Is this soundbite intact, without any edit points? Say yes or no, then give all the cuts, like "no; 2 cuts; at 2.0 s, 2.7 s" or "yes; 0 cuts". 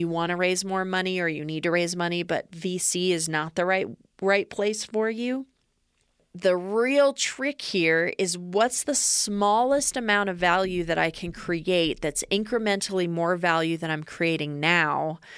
yes; 0 cuts